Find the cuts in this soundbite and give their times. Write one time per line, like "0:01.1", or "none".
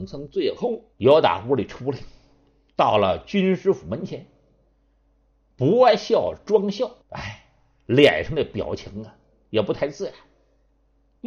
0:00.9
0:07.0

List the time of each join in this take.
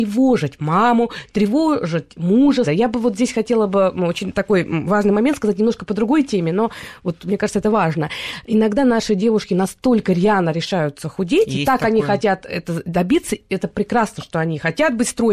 0:02.6

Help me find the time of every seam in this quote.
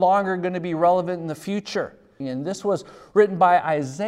0:02.2

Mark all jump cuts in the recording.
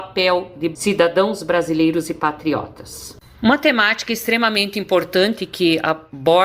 none

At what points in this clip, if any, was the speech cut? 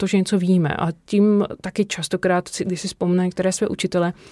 none

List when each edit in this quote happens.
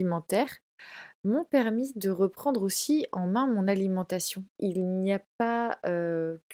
0:04.6

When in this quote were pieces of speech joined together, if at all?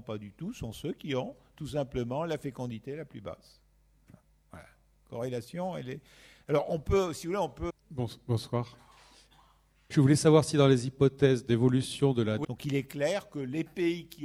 0:07.7
0:09.9
0:12.4

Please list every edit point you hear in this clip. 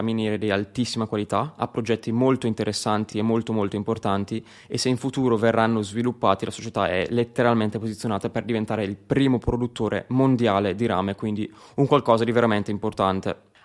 none

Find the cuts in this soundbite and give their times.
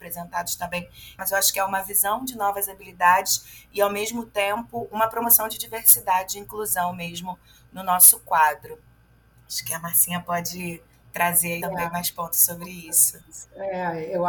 0:01.2
0:11.6

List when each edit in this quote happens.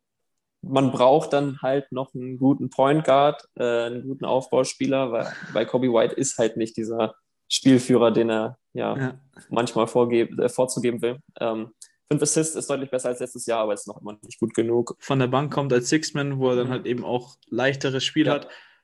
0:15.0

